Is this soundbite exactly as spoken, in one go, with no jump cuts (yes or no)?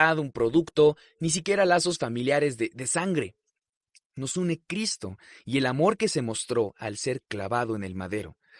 yes